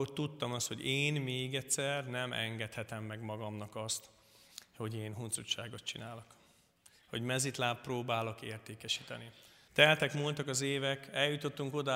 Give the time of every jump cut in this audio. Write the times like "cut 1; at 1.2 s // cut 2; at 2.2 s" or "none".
cut 1; at 9.7 s